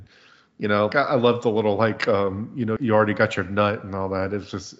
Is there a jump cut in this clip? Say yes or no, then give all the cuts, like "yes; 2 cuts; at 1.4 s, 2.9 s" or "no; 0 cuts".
yes; 2 cuts; at 0.9 s, 2.8 s